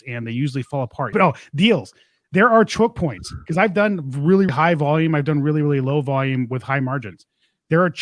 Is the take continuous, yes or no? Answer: no